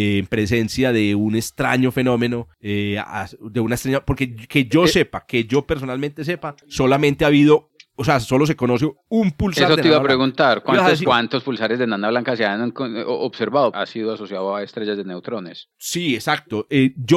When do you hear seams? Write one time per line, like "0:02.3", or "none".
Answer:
0:11.0
0:13.7